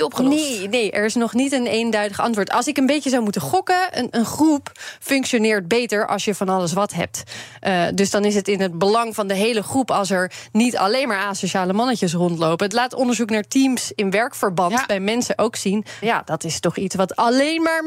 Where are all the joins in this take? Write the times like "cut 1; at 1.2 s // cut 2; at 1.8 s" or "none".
cut 1; at 4.1 s // cut 2; at 16.0 s